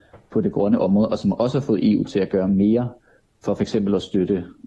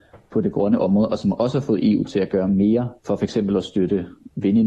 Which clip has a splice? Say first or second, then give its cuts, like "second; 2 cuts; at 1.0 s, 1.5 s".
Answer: second; 1 cut; at 3.0 s